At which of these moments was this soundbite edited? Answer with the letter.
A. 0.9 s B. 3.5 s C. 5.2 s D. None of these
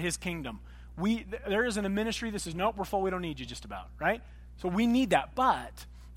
D